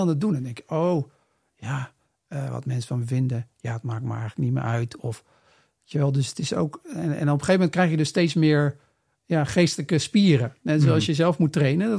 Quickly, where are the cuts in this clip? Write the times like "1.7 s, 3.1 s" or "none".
none